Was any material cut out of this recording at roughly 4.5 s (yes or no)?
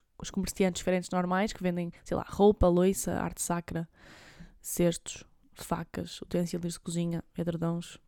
no